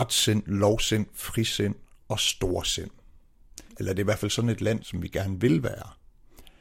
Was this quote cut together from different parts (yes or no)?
yes